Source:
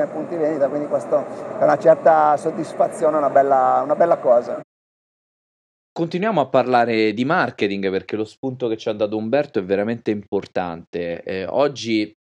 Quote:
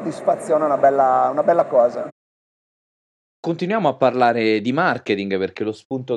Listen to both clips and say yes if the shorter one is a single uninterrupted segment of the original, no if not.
yes